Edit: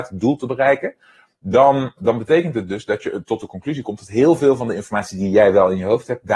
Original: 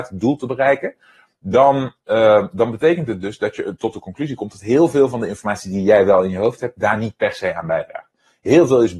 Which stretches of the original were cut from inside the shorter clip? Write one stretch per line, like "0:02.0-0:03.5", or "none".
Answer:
0:02.0-0:02.5